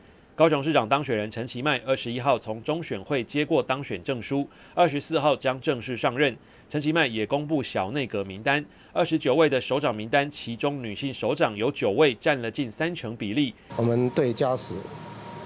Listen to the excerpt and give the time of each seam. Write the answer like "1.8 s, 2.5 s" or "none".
13.7 s